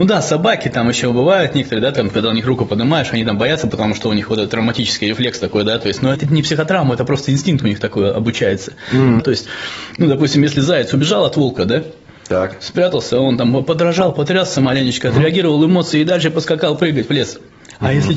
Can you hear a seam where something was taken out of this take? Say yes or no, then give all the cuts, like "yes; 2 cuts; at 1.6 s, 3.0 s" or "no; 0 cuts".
yes; 2 cuts; at 6.1 s, 9.2 s